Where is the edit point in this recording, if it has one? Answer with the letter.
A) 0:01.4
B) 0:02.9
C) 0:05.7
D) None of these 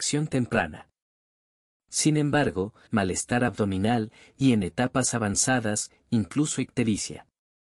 B